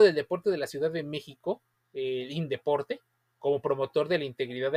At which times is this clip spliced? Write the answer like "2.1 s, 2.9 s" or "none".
none